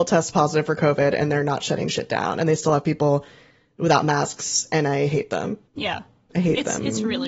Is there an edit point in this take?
yes; 1 cut; at 5.6 s

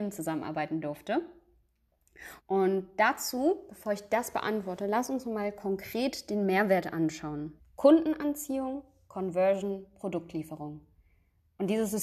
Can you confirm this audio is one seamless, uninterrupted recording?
no; 2 cuts; at 2.4 s, 7.6 s

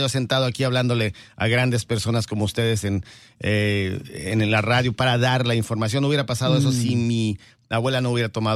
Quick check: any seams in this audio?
no; 0 cuts

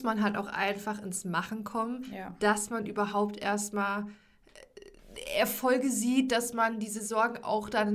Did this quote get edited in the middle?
no; 0 cuts

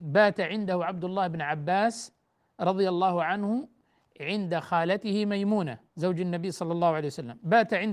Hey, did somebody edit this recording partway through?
yes; 1 cut; at 5.9 s

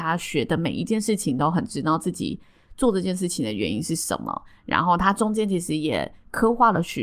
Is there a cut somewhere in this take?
no; 0 cuts

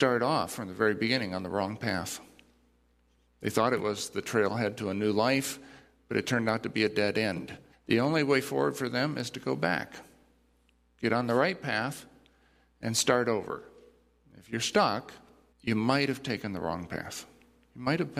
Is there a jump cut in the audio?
yes; 2 cuts; at 7.7 s, 15.5 s

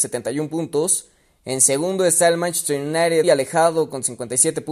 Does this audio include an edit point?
yes; 1 cut; at 3.2 s

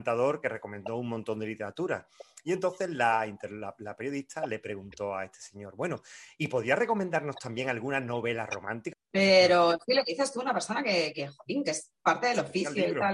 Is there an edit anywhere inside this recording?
yes; 1 cut; at 8.9 s

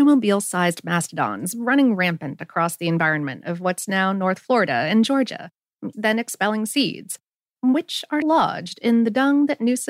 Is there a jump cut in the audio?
yes; 2 cuts; at 5.9 s, 8.2 s

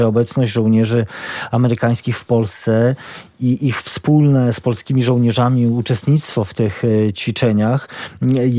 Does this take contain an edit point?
no; 0 cuts

